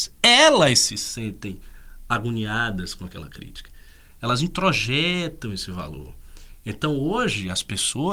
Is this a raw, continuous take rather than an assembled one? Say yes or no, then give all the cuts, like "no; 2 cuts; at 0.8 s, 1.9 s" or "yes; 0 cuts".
yes; 0 cuts